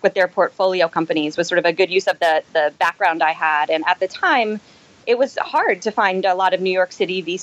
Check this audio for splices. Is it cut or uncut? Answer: uncut